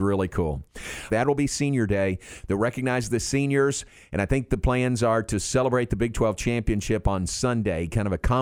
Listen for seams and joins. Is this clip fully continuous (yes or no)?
no